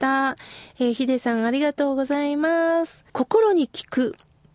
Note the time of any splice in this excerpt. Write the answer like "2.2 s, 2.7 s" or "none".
3.1 s